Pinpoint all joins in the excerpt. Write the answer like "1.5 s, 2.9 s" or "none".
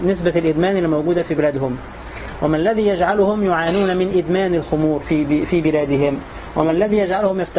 none